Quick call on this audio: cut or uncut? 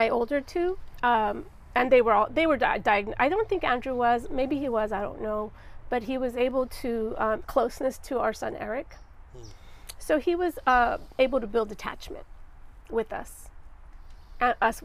cut